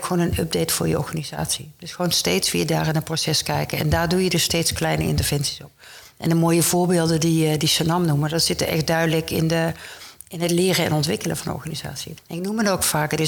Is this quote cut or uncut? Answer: cut